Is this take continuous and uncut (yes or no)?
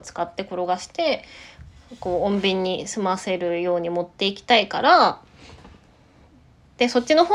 yes